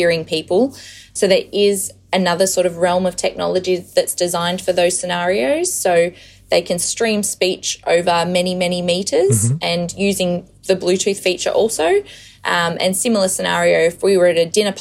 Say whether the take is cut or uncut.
uncut